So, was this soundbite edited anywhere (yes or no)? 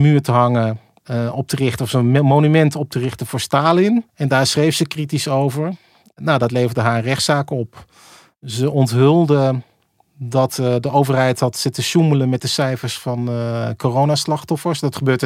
yes